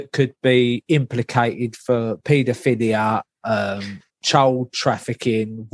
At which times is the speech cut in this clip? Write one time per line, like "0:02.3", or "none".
0:04.1